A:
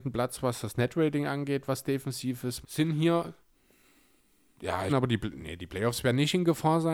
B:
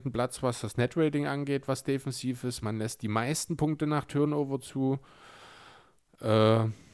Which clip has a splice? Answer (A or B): A